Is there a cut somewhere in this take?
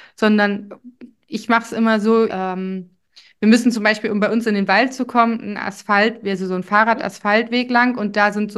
yes; 1 cut; at 2.3 s

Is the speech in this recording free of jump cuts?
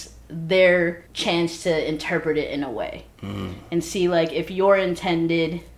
no; 1 cut; at 1.1 s

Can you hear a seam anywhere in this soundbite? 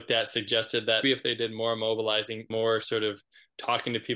yes; 2 cuts; at 1.0 s, 2.5 s

